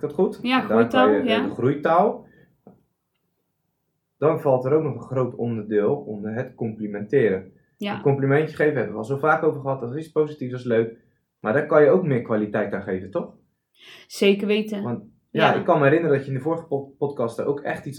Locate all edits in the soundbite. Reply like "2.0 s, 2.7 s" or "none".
none

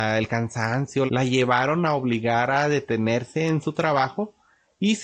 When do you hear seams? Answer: 1.1 s

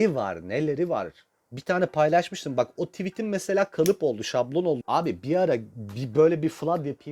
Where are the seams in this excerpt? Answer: 2.8 s, 4.8 s

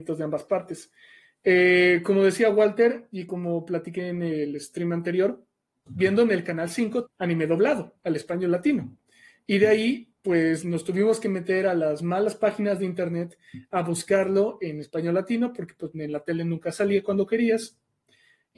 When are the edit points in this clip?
5.9 s, 7.1 s

